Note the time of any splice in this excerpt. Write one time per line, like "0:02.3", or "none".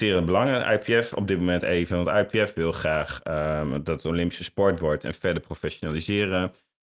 none